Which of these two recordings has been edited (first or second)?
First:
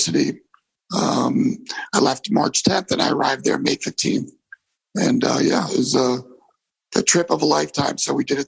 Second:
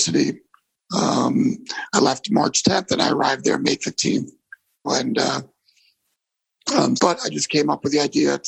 second